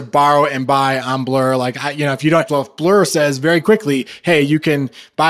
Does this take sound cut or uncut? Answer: cut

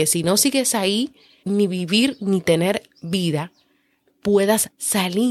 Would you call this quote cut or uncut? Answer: cut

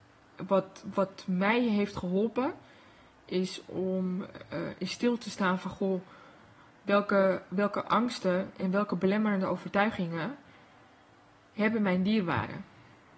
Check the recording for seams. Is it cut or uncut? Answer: uncut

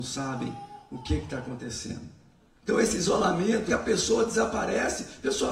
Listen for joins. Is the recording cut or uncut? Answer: cut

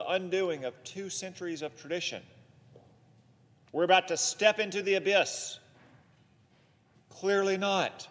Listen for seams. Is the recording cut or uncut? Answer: cut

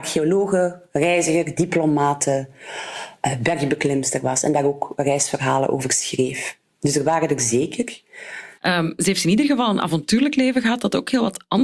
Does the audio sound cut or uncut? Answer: cut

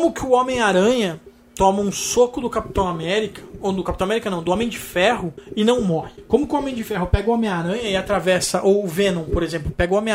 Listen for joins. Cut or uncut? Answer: cut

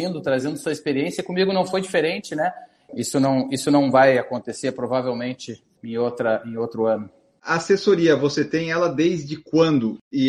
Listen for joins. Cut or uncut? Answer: cut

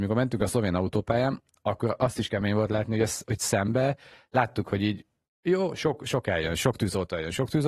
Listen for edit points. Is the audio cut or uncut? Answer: uncut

